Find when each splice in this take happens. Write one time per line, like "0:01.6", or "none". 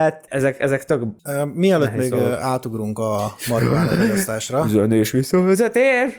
none